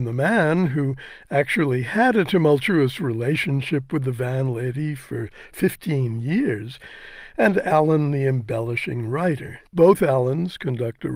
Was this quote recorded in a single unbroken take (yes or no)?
no